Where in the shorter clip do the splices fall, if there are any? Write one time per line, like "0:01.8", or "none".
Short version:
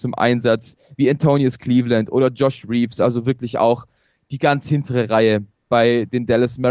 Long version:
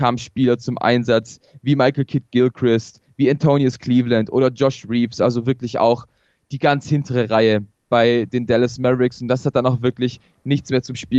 0:00.9